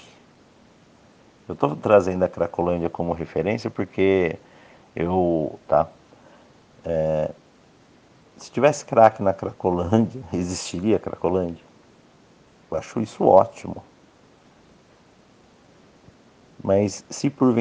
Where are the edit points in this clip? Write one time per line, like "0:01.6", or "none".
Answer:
0:05.6
0:12.6